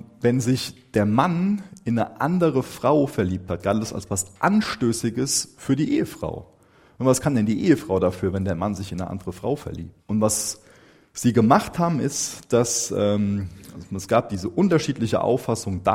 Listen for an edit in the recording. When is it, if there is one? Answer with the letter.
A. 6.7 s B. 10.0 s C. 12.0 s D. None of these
B